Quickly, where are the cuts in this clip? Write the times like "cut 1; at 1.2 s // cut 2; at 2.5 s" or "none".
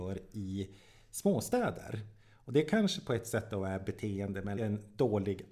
cut 1; at 4.6 s